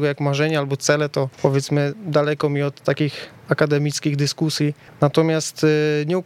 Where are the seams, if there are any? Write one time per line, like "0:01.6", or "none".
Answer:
none